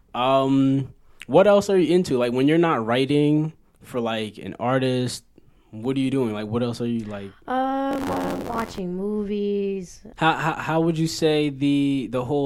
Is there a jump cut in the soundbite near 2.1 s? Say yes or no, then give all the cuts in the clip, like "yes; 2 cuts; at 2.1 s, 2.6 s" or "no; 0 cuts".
no; 1 cut; at 10.1 s